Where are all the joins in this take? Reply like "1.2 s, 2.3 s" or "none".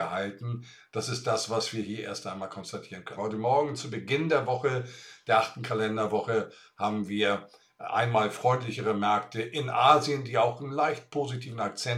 3.2 s